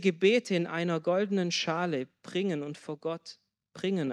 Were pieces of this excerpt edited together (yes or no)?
no